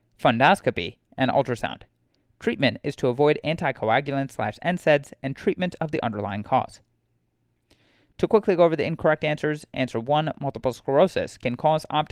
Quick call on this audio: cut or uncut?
uncut